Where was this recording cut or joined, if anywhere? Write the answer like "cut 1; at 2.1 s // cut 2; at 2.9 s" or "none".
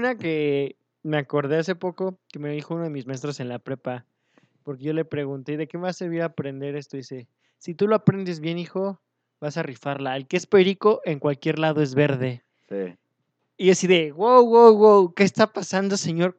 none